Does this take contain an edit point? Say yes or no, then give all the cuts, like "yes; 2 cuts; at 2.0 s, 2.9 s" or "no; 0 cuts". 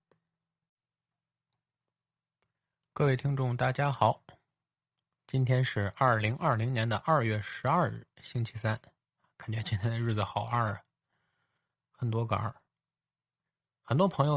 no; 0 cuts